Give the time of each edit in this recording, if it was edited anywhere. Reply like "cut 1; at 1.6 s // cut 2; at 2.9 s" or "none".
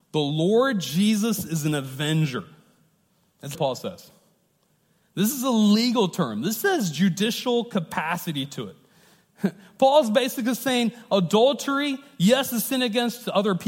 cut 1; at 3.5 s